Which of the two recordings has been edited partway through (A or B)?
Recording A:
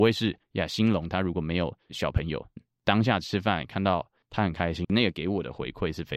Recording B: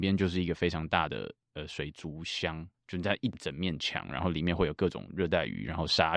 A